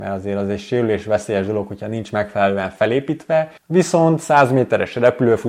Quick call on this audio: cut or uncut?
cut